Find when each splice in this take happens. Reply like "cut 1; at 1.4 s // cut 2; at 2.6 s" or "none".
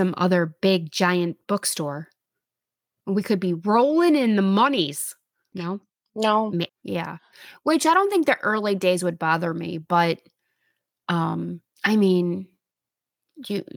cut 1; at 5.5 s // cut 2; at 6.7 s // cut 3; at 11.7 s